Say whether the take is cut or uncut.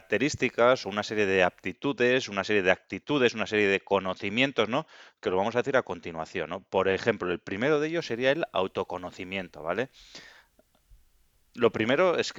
uncut